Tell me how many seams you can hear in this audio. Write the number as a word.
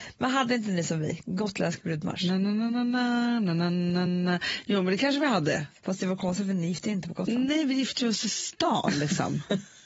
zero